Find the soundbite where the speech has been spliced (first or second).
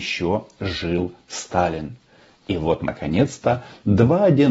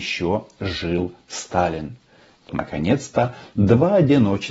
second